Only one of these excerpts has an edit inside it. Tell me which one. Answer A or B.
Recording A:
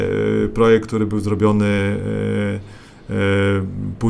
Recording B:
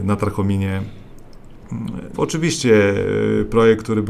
B